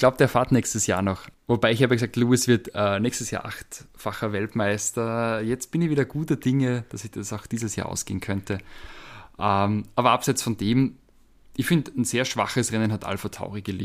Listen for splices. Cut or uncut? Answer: uncut